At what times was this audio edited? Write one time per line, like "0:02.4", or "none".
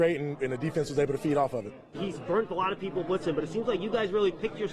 0:01.9